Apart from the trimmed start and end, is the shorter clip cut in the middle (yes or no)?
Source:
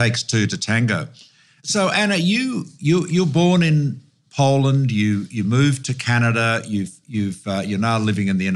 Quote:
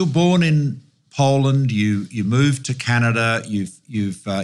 no